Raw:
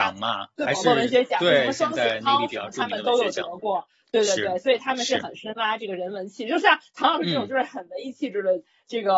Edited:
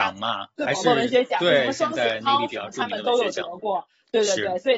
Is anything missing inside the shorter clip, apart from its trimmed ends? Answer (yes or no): no